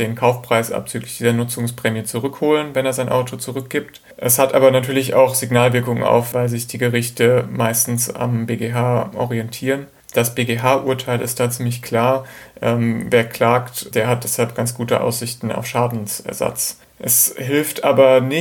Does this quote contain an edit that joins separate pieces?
yes; 3 cuts; at 4.1 s, 6.3 s, 13.9 s

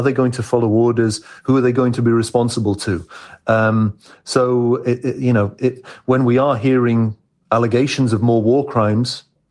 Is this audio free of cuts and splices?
yes; 0 cuts

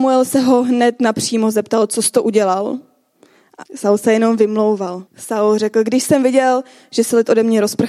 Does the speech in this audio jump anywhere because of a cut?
yes; 2 cuts; at 3.7 s, 5.1 s

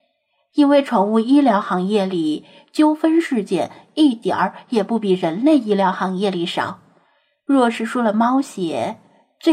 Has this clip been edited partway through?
no; 0 cuts

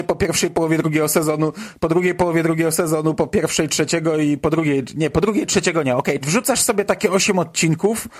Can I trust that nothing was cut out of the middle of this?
no; 1 cut; at 6.2 s

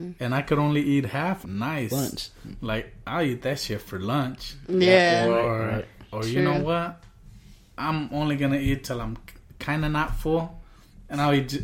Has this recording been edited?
yes; 1 cut; at 1.4 s

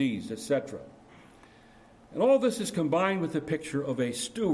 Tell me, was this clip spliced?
no; 0 cuts

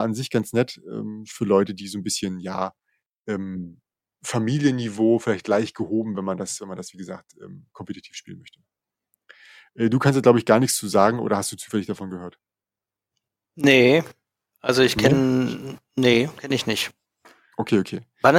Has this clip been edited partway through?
no; 0 cuts

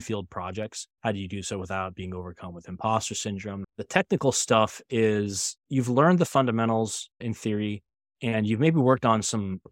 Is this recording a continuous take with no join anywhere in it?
no; 3 cuts; at 1.0 s, 3.6 s, 5.6 s

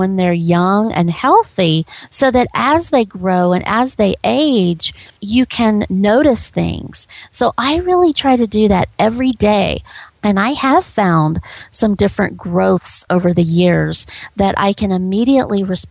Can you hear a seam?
yes; 1 cut; at 10.1 s

